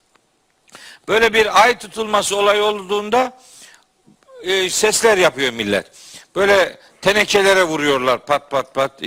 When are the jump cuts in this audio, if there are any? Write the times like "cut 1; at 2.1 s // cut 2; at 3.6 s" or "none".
cut 1; at 4.7 s